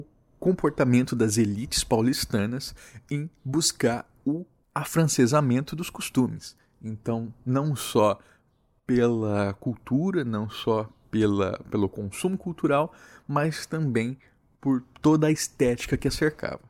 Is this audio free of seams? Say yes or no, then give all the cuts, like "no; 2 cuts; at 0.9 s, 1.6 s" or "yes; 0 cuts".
yes; 0 cuts